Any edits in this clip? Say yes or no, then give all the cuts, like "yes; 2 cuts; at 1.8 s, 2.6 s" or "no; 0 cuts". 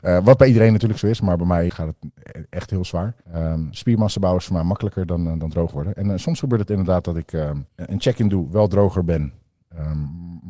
yes; 3 cuts; at 1.7 s, 3.2 s, 7.7 s